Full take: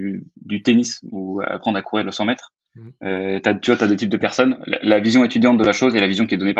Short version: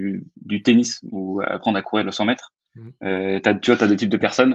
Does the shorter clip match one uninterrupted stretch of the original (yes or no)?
yes